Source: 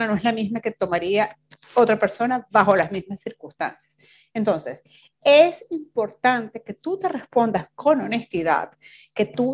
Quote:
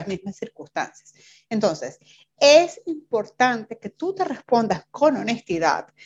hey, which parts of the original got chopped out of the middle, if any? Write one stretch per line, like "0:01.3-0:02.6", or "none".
none